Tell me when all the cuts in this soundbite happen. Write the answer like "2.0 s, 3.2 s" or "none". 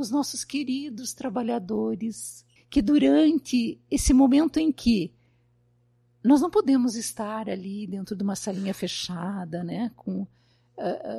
2.6 s